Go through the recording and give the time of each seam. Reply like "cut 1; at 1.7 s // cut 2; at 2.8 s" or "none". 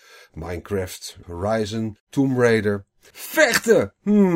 cut 1; at 1.2 s // cut 2; at 3.1 s